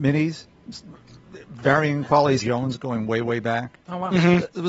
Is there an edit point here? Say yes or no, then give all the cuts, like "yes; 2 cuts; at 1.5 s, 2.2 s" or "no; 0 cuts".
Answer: yes; 1 cut; at 2.4 s